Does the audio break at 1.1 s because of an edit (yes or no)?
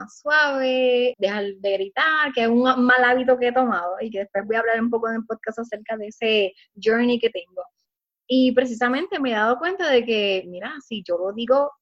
yes